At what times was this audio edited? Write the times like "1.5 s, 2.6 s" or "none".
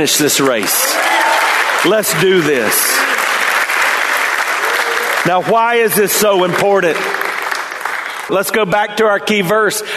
8.3 s